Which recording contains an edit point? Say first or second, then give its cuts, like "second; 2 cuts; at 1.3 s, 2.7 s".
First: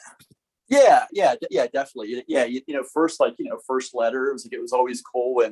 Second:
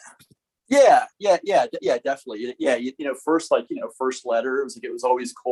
first; 1 cut; at 1.1 s